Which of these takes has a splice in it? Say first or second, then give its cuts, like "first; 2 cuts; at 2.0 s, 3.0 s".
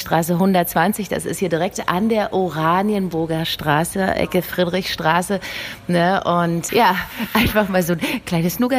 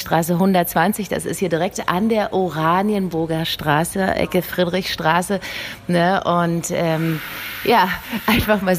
first; 1 cut; at 6.7 s